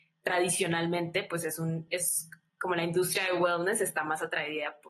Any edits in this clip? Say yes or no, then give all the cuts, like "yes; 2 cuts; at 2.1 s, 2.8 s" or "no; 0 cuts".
no; 0 cuts